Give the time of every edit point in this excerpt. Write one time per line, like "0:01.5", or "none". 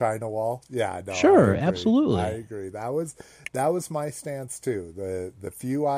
none